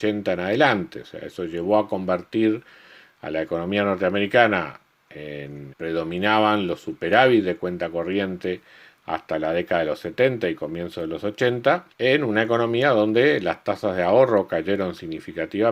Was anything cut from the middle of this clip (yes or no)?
yes